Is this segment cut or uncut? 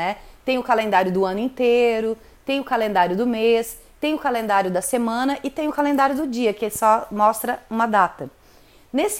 uncut